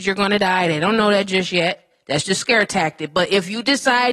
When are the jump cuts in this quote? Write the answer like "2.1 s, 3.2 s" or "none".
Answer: 2.2 s